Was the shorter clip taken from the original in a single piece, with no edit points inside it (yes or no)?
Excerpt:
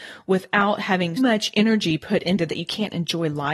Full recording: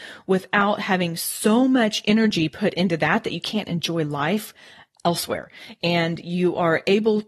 no